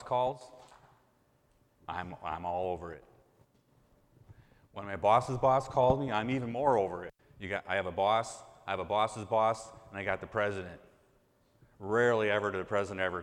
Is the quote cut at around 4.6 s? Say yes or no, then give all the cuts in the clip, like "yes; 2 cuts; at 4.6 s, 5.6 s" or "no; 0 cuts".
no; 1 cut; at 7.2 s